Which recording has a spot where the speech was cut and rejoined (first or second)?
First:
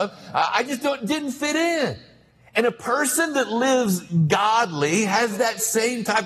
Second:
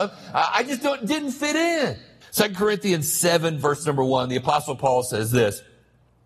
second